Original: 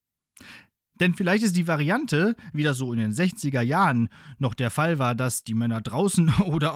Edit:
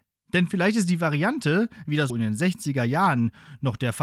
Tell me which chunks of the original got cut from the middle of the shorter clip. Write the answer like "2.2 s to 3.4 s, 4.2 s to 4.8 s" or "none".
2.8 s to 2.9 s